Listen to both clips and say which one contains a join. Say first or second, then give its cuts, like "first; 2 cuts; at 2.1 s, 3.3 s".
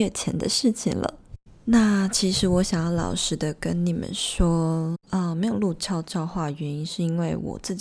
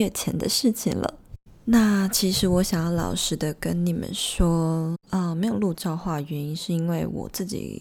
second; 1 cut; at 5.7 s